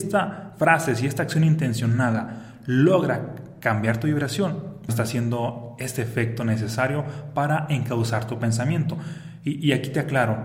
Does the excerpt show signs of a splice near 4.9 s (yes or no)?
yes